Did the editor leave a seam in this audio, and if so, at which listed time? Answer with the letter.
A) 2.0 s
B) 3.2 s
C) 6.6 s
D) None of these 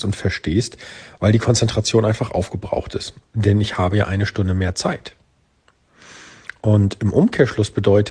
B